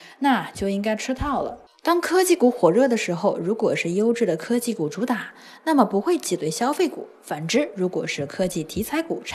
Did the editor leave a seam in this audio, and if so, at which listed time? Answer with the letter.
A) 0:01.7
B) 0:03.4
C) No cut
A